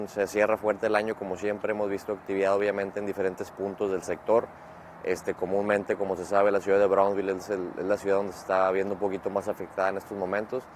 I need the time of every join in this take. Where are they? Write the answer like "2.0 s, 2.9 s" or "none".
none